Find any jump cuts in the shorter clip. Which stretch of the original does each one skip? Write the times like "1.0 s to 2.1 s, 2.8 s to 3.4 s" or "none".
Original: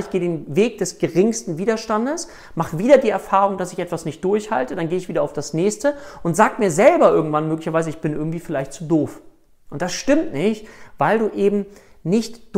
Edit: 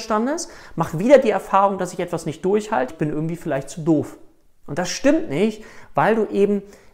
4.7 s to 7.9 s